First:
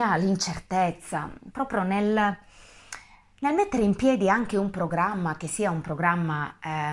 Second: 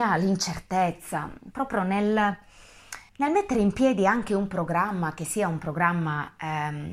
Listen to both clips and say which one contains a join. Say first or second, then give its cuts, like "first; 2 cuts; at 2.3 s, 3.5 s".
second; 1 cut; at 3.1 s